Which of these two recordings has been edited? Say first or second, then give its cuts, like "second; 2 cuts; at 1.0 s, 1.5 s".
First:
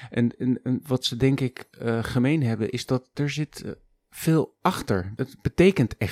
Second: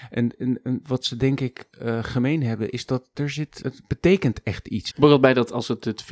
second; 2 cuts; at 3.6 s, 4.9 s